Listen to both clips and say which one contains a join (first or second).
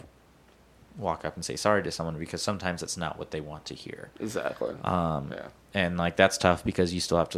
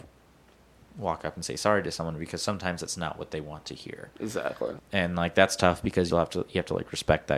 second